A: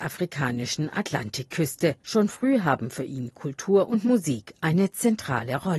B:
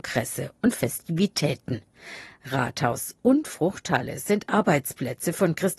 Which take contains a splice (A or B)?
A